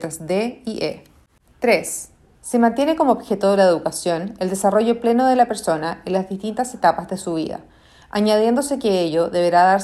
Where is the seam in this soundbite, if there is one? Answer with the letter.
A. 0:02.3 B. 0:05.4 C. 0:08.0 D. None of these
A